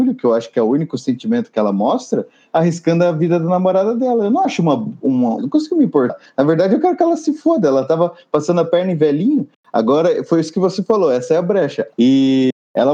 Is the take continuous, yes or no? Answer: no